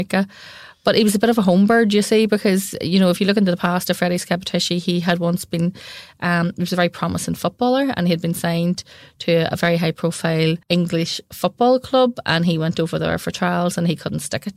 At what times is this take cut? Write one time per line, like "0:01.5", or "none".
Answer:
0:10.6